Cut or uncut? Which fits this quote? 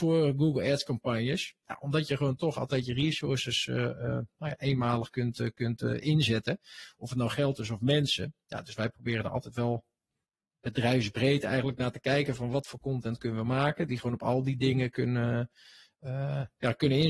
uncut